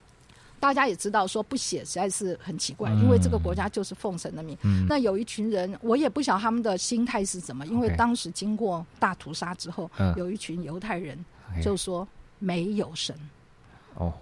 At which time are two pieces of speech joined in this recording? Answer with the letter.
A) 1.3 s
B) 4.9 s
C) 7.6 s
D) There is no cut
B